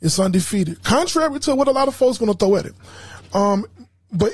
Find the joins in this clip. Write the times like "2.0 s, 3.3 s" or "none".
none